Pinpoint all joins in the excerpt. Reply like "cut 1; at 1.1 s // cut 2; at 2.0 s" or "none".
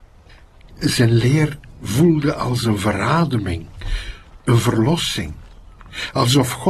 none

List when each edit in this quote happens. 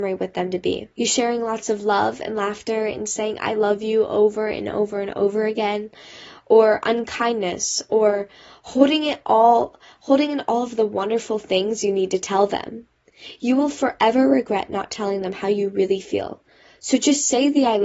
cut 1; at 0.9 s

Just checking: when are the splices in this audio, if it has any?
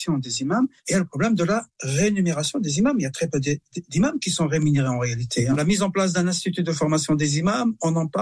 none

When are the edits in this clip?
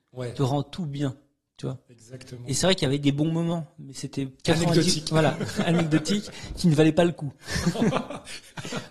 cut 1; at 4.4 s

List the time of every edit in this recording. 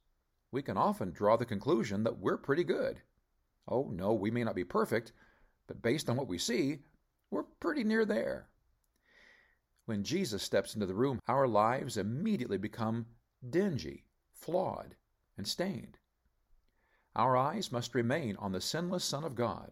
cut 1; at 11.2 s

